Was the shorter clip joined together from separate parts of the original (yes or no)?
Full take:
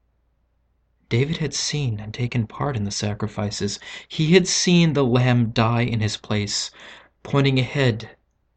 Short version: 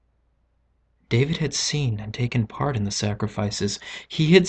no